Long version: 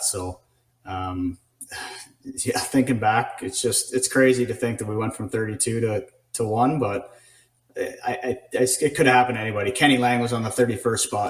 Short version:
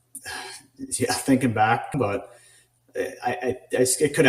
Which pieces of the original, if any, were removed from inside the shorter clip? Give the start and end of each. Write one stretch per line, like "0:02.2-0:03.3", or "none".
0:03.4-0:06.8